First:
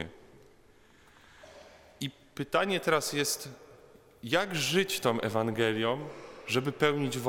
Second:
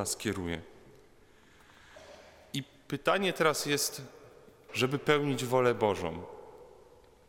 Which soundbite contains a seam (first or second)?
second